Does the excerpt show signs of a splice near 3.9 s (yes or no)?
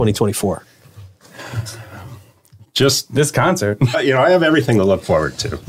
yes